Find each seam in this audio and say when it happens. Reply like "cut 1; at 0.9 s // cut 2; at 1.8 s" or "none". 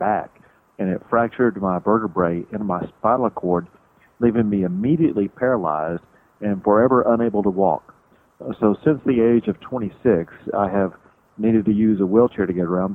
none